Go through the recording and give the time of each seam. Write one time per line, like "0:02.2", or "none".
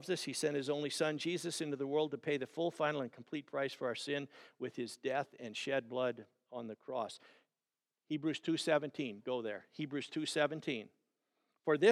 none